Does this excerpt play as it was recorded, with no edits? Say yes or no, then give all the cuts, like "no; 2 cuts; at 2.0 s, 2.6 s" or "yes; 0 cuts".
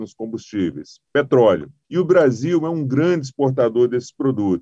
no; 1 cut; at 1.8 s